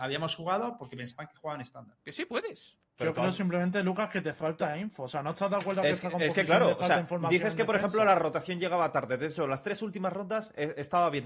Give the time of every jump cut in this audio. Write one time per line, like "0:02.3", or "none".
0:02.0